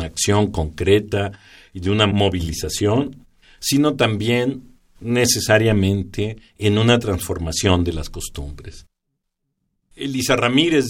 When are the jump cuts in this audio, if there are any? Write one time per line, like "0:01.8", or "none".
0:09.9